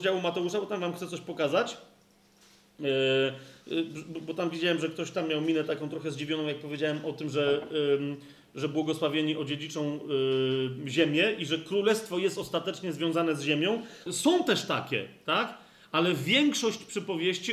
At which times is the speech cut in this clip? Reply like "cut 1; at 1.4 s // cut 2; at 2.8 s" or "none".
cut 1; at 14.1 s